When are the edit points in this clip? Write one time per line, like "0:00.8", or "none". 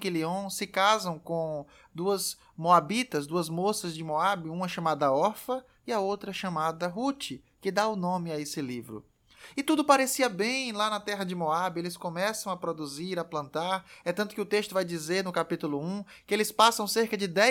none